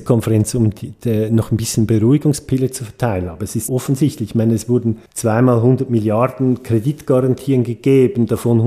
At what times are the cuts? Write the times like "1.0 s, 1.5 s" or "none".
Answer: 3.7 s, 5.1 s